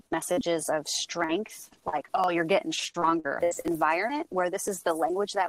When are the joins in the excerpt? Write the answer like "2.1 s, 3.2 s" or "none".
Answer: 3.4 s